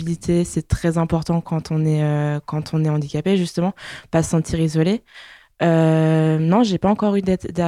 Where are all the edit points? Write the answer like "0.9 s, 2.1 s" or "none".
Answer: none

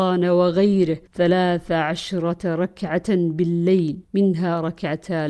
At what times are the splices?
1.1 s, 4.0 s

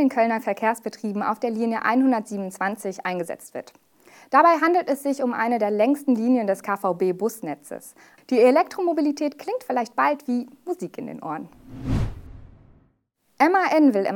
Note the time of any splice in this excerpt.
8.2 s

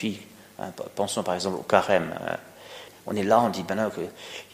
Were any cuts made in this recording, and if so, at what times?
none

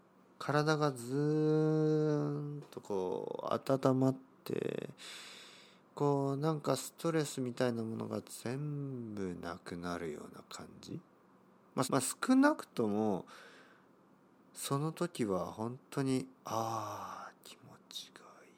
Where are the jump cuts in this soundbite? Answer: 11.8 s

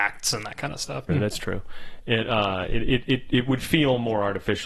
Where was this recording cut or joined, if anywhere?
1.1 s

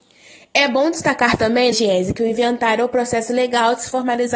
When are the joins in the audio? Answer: 1.7 s

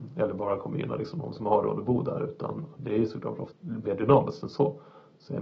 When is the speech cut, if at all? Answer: 3.5 s

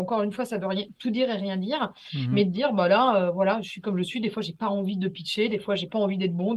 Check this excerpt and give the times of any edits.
none

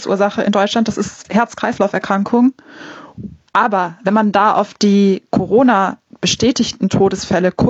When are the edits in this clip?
3.5 s

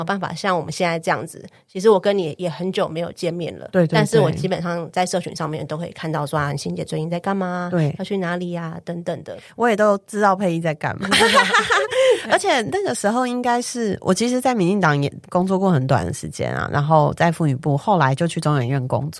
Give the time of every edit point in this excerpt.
none

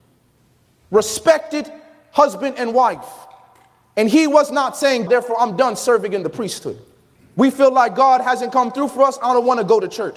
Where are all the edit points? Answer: 5.1 s, 7.2 s

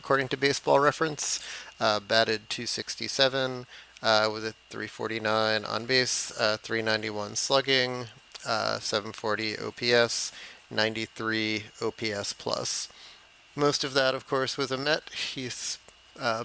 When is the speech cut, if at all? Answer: 1.7 s

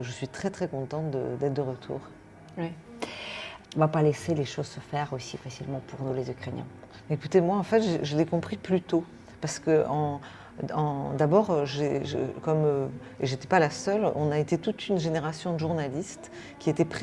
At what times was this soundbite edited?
3.6 s

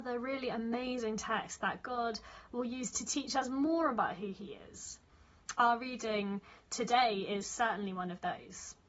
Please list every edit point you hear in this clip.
5.5 s

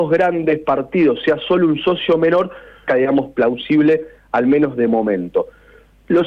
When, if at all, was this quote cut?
2.9 s

